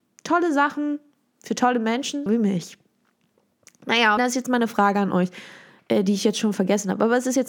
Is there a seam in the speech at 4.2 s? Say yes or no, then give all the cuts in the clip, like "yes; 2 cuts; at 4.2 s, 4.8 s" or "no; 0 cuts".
yes; 2 cuts; at 2.3 s, 4.2 s